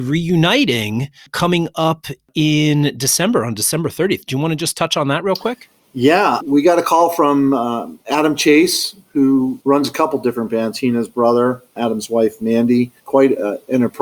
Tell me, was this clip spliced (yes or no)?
no